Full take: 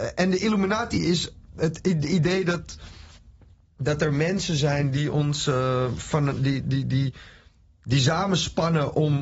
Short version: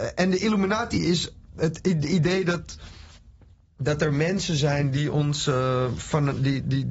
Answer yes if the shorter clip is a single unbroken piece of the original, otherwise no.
yes